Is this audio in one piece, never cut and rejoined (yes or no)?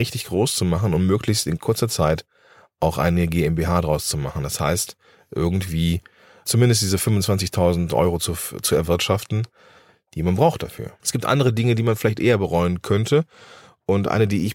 no